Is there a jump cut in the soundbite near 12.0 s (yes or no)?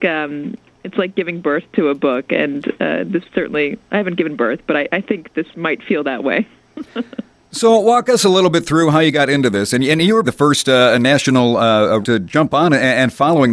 yes